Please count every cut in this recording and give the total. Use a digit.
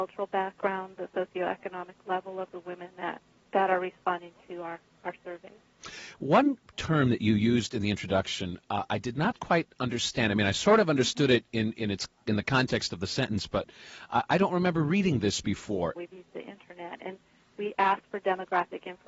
1